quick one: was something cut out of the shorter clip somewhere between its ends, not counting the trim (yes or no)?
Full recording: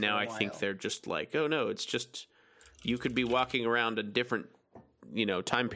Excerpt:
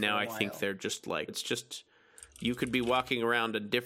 yes